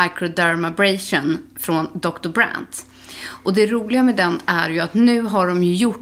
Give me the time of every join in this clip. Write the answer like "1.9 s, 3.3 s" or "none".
none